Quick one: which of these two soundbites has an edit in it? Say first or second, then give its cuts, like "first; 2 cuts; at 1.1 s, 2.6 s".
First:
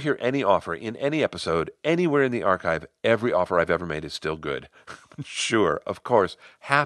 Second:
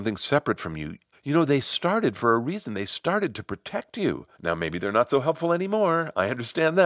second; 2 cuts; at 1.1 s, 4.3 s